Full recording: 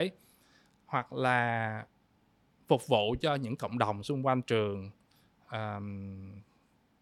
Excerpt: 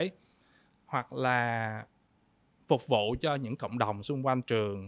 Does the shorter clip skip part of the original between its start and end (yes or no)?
no